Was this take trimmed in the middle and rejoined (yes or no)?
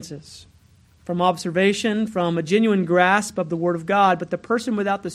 no